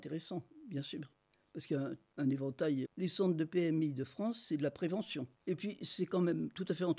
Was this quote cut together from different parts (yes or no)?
yes